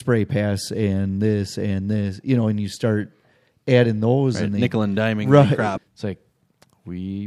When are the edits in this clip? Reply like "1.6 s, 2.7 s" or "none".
5.8 s